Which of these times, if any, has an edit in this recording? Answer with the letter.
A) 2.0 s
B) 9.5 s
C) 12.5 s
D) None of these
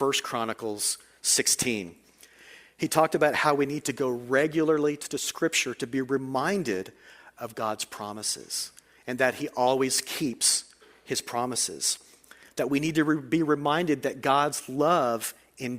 D